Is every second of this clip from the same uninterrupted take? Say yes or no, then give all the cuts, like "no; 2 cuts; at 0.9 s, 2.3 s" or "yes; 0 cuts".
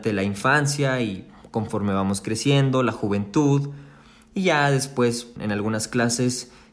no; 1 cut; at 5.4 s